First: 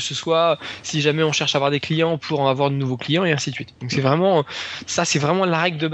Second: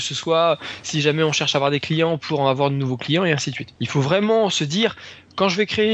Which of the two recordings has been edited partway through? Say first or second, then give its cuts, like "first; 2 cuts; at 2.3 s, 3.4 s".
second; 1 cut; at 3.7 s